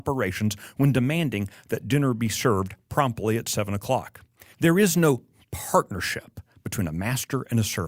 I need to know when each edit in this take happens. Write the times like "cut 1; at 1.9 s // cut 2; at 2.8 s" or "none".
cut 1; at 4.5 s